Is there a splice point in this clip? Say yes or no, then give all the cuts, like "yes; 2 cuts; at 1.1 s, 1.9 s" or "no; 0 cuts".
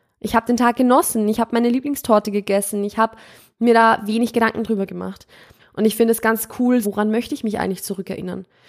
yes; 2 cuts; at 5.6 s, 6.8 s